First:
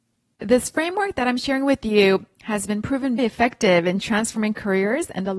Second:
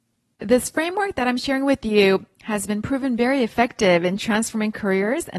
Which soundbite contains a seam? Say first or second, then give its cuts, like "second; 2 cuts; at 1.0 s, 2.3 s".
first; 1 cut; at 3.2 s